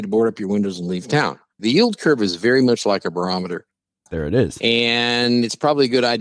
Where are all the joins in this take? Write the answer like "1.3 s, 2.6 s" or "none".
1.6 s, 4.1 s